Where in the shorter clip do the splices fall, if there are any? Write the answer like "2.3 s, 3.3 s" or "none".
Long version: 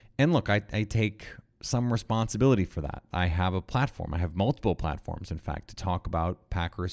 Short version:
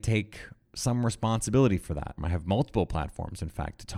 2.2 s